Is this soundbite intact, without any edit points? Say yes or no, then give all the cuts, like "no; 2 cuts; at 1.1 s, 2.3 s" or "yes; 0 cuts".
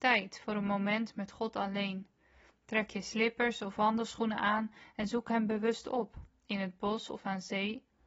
yes; 0 cuts